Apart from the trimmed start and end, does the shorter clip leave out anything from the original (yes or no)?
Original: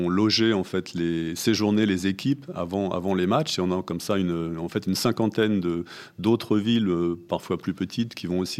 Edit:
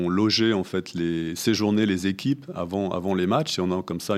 no